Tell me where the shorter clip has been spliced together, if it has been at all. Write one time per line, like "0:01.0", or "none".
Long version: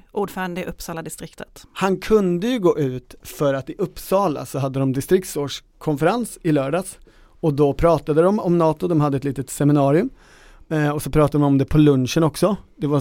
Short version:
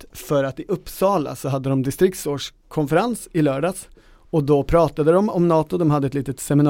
none